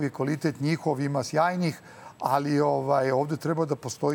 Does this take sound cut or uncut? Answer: uncut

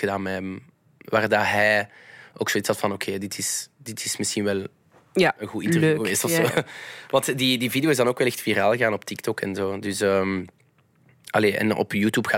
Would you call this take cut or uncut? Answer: uncut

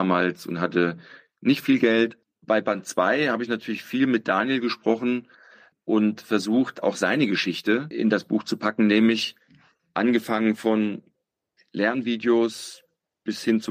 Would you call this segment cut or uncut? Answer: uncut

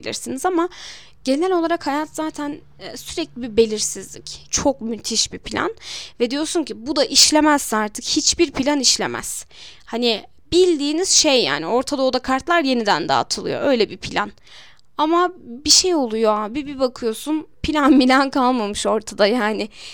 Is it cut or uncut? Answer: cut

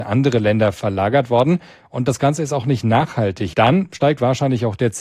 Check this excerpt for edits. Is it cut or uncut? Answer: cut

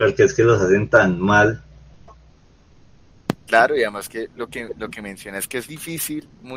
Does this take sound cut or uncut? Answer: cut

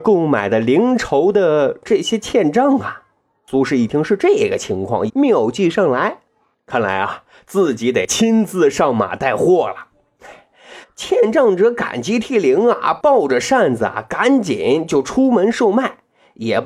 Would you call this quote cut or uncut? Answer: cut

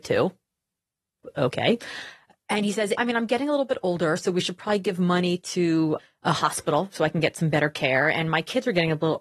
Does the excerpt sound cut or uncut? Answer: cut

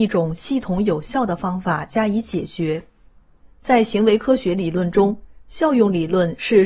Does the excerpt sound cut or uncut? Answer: cut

